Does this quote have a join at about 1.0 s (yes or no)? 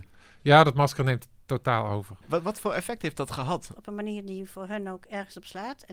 no